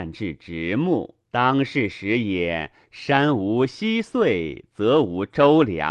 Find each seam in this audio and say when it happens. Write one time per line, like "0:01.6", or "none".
0:01.2